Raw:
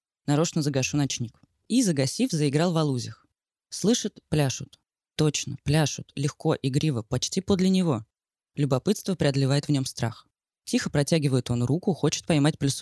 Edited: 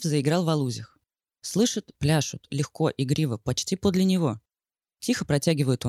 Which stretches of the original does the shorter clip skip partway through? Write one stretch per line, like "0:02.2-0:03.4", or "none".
0:04.2-0:05.6
0:08.5-0:10.5